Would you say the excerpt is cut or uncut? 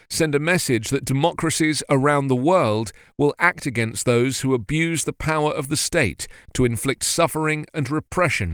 uncut